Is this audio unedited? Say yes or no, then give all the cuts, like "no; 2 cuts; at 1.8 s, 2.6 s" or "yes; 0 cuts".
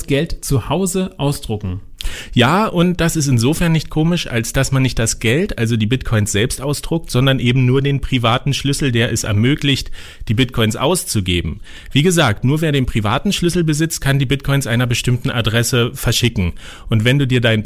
yes; 0 cuts